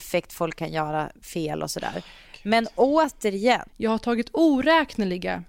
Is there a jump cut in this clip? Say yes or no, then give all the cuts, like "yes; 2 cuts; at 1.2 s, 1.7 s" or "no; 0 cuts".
yes; 1 cut; at 3.7 s